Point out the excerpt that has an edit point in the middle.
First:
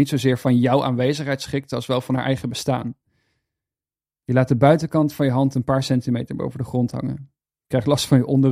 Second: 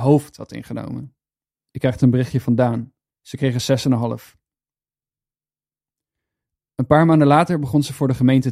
second; 2 cuts; at 1.6 s, 3.1 s

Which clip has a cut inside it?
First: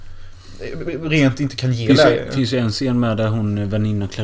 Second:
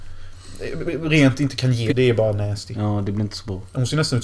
second; 1 cut; at 1.9 s

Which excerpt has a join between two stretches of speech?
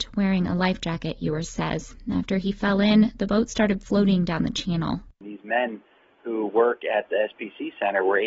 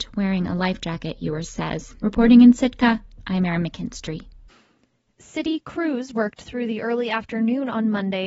second; 1 cut; at 2.0 s

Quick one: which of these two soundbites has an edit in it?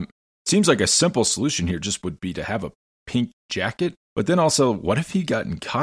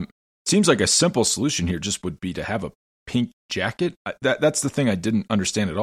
first; 1 cut; at 4.0 s

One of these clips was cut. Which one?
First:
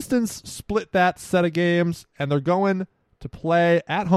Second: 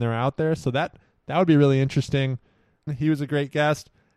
second; 1 cut; at 2.9 s

